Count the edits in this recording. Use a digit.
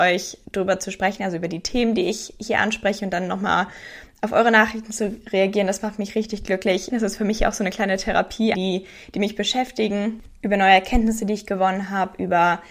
2